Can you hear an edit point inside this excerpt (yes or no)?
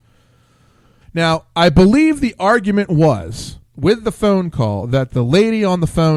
yes